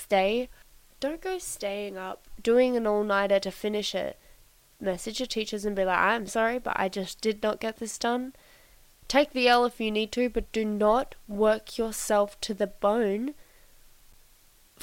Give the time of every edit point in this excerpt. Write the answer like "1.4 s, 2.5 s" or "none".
6.3 s